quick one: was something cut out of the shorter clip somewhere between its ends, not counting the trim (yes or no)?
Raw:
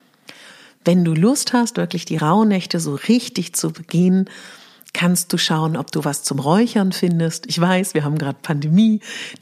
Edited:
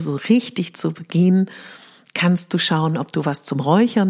no